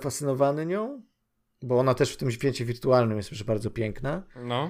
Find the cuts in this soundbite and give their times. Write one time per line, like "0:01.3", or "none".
none